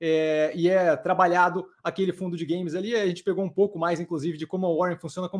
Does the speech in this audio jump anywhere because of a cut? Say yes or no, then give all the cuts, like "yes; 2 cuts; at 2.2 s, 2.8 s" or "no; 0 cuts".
no; 0 cuts